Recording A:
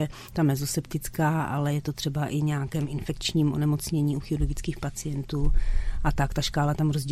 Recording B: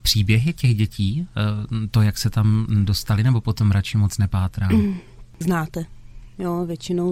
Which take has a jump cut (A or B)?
B